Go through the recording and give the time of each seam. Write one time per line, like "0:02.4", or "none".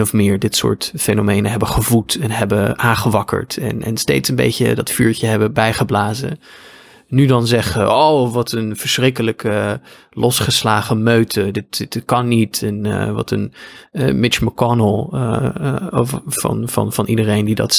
none